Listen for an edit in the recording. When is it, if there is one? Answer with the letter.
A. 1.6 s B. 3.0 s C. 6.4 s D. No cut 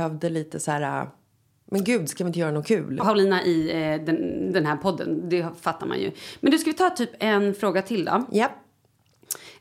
B